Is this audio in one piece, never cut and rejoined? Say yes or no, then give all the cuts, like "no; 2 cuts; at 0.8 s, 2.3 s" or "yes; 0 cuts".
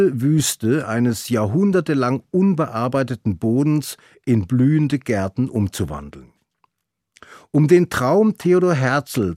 yes; 0 cuts